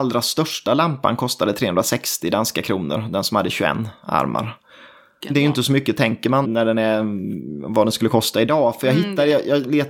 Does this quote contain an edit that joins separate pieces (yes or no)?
yes